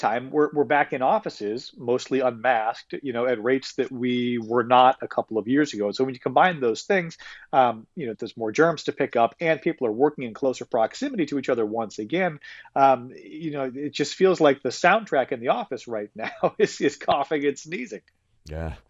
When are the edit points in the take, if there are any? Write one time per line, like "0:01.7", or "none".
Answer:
0:08.1